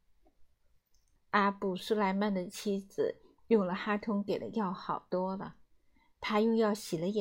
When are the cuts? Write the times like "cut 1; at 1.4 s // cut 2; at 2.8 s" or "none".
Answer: cut 1; at 1.2 s